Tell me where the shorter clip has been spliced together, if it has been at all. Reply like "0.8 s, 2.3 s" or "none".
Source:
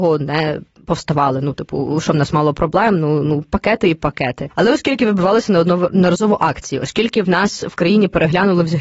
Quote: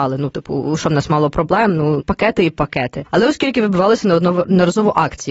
2.0 s